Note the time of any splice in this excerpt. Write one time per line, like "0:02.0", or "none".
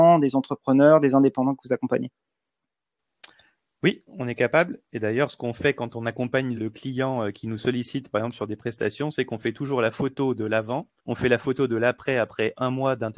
0:06.6
0:11.0